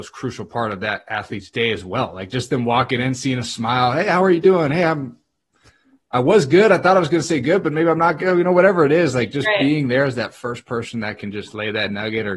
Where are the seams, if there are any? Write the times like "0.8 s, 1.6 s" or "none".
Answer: none